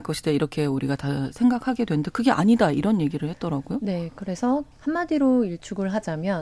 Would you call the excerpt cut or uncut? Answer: cut